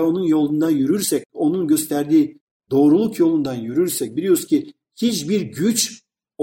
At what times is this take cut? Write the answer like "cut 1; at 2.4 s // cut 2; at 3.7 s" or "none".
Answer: cut 1; at 1.3 s

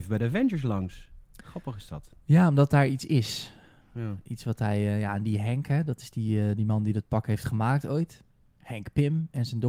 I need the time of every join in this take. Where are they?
cut 1; at 8.6 s

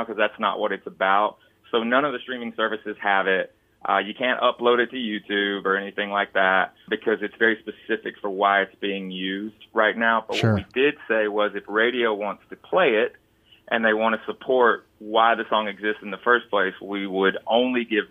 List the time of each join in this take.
none

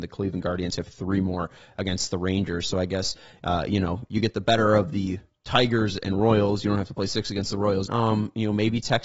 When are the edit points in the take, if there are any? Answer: cut 1; at 7.9 s

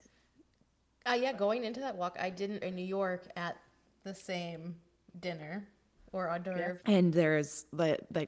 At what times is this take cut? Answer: cut 1; at 2.6 s // cut 2; at 6.8 s

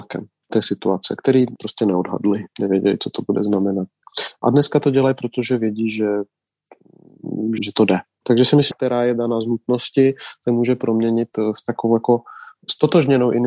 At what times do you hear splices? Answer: cut 1; at 7.6 s // cut 2; at 8.7 s

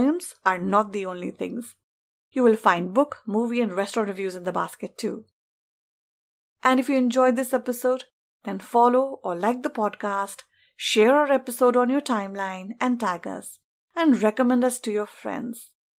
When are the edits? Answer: none

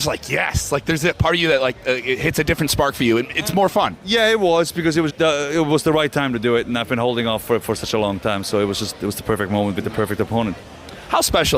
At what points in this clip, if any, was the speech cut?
cut 1; at 5.1 s

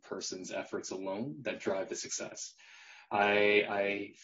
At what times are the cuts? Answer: none

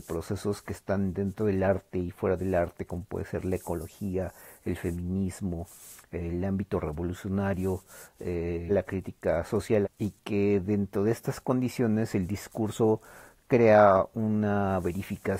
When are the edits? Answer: cut 1; at 8.7 s // cut 2; at 9.8 s

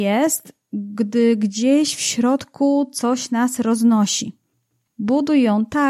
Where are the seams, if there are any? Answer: cut 1; at 4.9 s

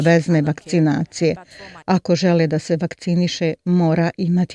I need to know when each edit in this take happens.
cut 1; at 1.8 s

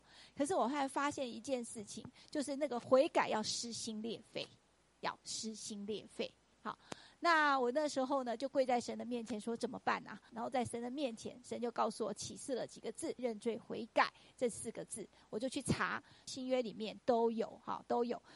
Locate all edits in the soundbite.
cut 1; at 10.3 s // cut 2; at 13.2 s // cut 3; at 16.3 s

